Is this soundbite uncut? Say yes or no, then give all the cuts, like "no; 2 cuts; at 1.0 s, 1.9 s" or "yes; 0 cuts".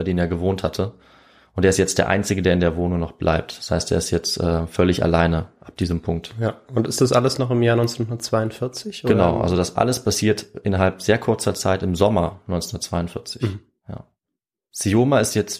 yes; 0 cuts